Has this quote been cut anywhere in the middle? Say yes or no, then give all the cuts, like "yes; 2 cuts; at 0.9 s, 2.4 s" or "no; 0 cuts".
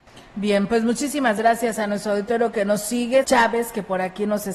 yes; 1 cut; at 3.2 s